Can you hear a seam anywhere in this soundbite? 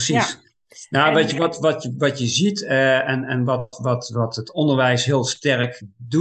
no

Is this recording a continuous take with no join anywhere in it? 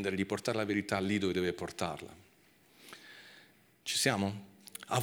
yes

